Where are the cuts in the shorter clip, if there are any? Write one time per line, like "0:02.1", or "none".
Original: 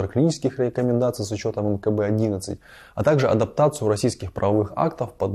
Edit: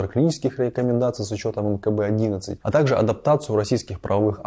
0:02.6